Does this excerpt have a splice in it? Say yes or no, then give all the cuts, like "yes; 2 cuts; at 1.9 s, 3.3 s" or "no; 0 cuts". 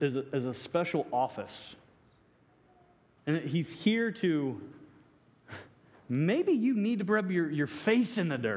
yes; 1 cut; at 3.2 s